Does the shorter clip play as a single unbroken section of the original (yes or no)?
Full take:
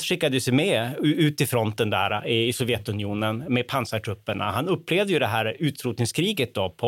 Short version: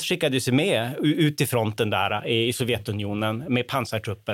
yes